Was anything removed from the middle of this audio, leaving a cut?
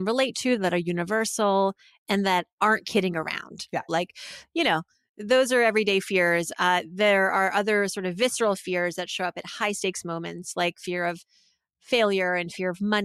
yes; 1 cut; at 3.9 s

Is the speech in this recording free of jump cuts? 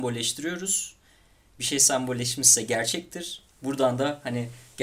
yes; 0 cuts

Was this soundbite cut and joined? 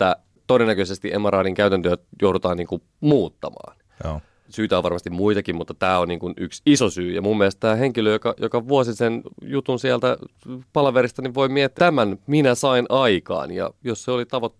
yes; 1 cut; at 11.8 s

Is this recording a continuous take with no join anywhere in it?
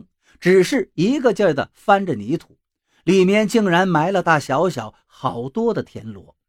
no; 1 cut; at 4.2 s

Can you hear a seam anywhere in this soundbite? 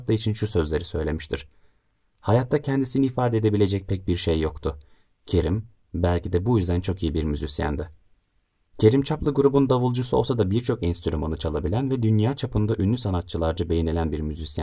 no; 0 cuts

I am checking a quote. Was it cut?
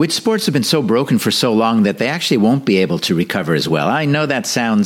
no; 0 cuts

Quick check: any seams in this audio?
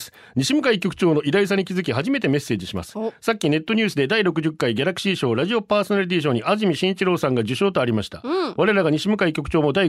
no; 0 cuts

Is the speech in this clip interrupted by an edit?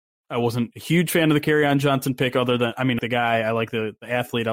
yes; 1 cut; at 3.0 s

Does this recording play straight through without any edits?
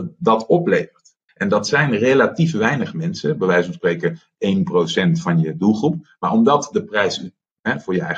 no; 1 cut; at 1.3 s

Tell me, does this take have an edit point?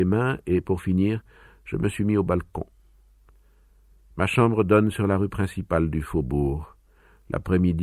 no; 0 cuts

